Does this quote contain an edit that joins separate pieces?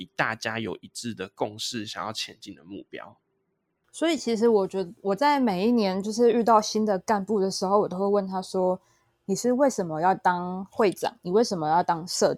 no; 0 cuts

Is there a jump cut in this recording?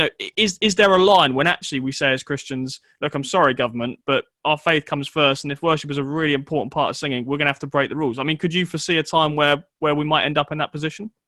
no; 0 cuts

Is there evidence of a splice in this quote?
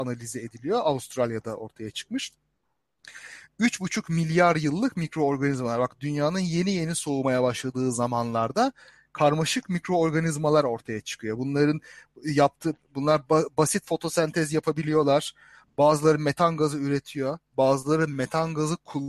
no; 0 cuts

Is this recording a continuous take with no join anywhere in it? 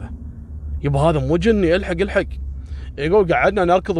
yes; 0 cuts

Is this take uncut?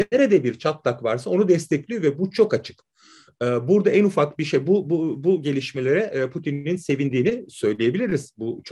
yes; 0 cuts

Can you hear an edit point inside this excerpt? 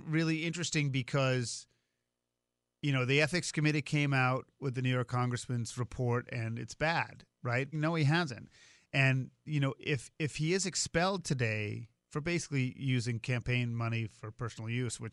yes; 2 cuts; at 7.7 s, 12.0 s

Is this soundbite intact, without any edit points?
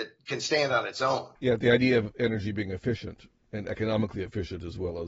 no; 1 cut; at 1.4 s

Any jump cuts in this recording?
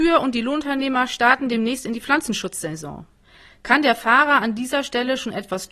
no; 0 cuts

